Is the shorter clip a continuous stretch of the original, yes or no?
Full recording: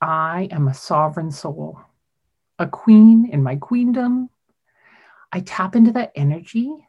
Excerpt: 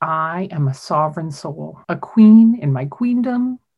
no